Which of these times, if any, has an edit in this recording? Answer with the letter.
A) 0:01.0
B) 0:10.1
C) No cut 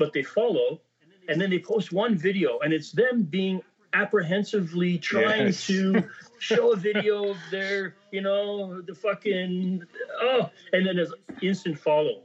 C